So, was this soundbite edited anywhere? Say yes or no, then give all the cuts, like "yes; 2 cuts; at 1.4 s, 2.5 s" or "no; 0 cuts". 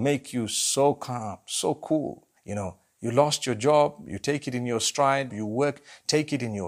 yes; 2 cuts; at 2.4 s, 5.3 s